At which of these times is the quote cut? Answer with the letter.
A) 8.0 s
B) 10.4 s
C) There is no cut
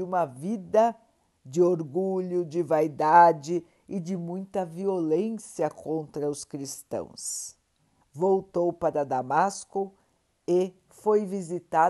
A